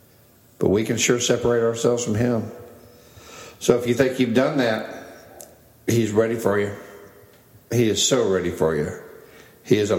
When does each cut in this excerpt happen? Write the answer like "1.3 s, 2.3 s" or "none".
none